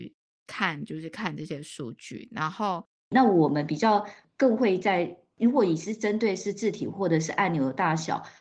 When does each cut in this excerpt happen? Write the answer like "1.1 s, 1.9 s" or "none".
3.1 s